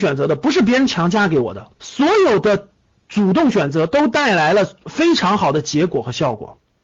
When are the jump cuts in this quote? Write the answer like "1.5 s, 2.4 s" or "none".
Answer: 1.8 s, 4.8 s